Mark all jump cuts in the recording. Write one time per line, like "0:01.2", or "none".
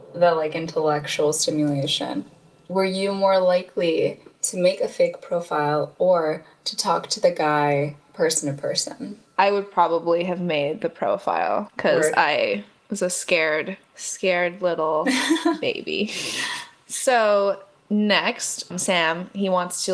0:18.7